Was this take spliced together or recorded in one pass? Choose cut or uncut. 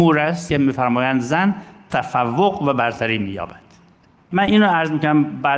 cut